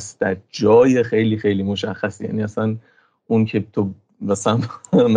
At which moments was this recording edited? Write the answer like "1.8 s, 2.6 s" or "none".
none